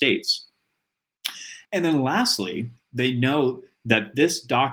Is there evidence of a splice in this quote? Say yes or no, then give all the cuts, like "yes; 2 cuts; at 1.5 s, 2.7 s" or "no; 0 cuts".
yes; 1 cut; at 1.7 s